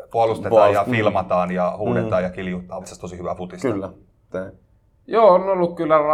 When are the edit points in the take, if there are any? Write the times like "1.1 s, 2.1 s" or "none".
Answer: 2.8 s, 4.3 s